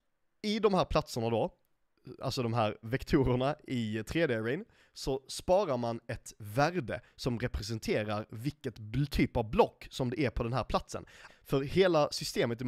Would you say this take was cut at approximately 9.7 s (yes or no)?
no